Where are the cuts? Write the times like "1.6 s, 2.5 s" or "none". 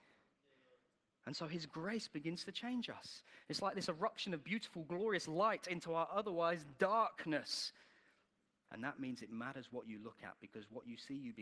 8.7 s